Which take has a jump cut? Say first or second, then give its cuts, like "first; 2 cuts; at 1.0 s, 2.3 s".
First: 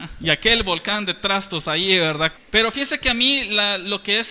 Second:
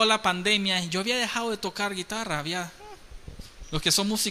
first; 1 cut; at 2.3 s